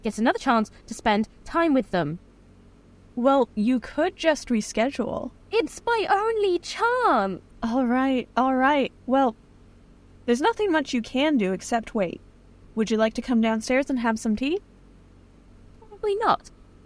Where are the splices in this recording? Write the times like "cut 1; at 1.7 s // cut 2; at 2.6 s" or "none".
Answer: cut 1; at 7.5 s // cut 2; at 15.8 s